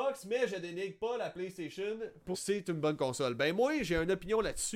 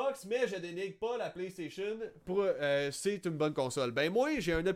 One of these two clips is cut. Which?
first; 1 cut; at 2.3 s

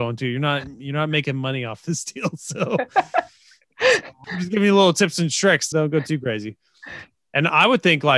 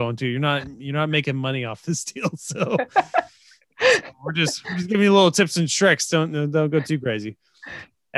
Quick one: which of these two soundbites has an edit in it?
first; 2 cuts; at 4.2 s, 5.7 s

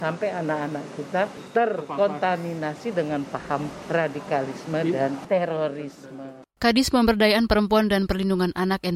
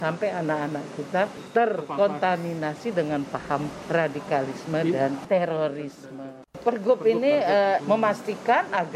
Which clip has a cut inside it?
second; 2 cuts; at 6.5 s, 7.8 s

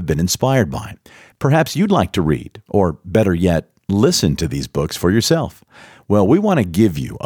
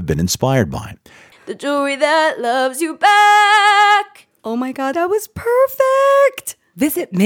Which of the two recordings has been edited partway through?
second; 2 cuts; at 1.3 s, 4.9 s

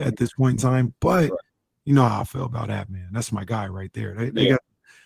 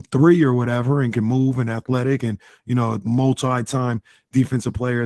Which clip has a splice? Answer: second; 1 cut; at 3.0 s

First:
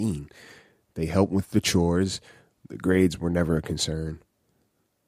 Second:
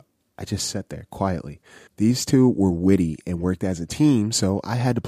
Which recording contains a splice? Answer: second; 1 cut; at 1.9 s

